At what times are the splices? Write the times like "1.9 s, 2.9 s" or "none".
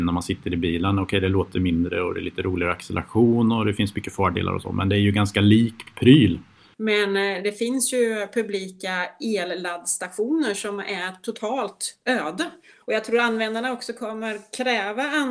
6.7 s, 12.8 s